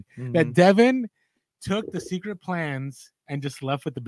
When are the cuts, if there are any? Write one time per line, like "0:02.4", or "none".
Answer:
none